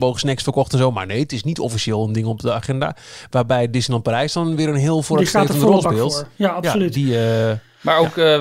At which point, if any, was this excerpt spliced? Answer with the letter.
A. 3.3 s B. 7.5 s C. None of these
C